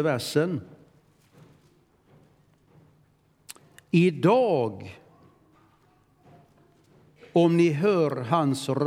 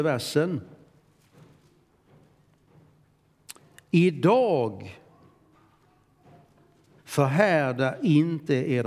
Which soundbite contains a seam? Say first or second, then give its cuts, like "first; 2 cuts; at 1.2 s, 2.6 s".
second; 1 cut; at 7.0 s